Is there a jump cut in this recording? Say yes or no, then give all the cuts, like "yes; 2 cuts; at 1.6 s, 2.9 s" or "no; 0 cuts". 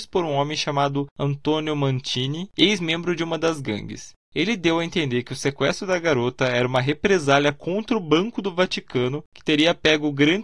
no; 0 cuts